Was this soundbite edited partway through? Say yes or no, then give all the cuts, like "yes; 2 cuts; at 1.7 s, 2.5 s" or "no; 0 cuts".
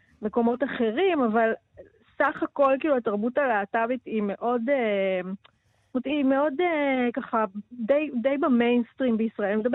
no; 0 cuts